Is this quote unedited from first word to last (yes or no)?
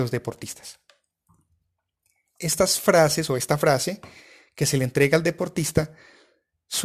yes